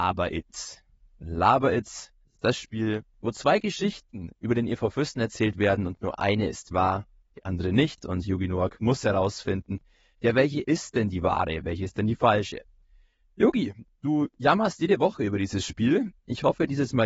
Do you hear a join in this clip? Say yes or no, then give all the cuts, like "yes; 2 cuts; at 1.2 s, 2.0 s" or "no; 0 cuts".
no; 0 cuts